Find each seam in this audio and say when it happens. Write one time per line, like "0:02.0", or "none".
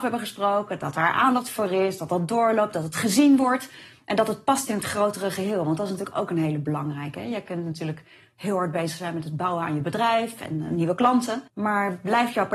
0:11.5